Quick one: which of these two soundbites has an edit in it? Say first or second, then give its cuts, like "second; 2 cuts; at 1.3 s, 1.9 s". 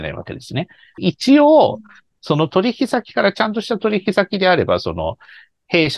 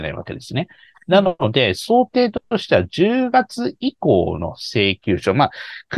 first; 1 cut; at 1.0 s